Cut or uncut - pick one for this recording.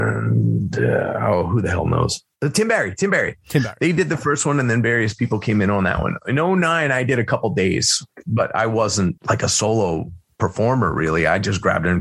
uncut